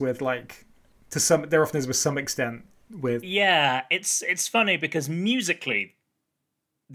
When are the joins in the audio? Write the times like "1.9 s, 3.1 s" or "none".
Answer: none